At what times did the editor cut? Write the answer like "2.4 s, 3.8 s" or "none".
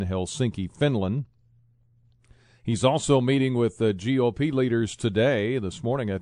none